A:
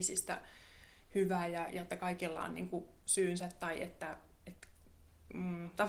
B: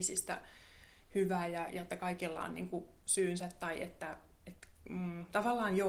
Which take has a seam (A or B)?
B